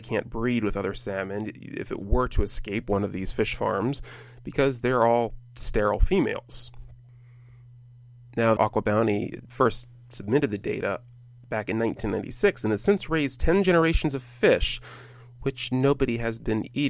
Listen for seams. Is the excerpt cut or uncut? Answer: cut